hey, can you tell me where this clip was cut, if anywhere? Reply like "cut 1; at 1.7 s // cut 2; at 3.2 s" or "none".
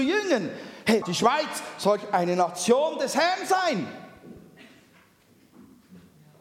cut 1; at 1.0 s